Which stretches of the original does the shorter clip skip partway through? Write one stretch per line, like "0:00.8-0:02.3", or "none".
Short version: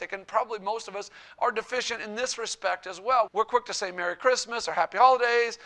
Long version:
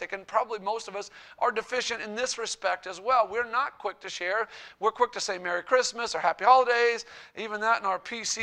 0:03.3-0:04.7